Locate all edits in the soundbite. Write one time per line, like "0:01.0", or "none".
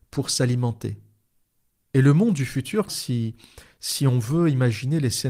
0:02.9